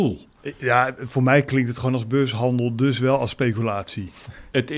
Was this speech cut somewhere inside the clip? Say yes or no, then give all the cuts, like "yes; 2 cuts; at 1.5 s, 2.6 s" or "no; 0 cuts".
no; 0 cuts